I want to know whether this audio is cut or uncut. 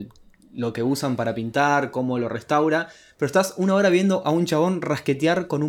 uncut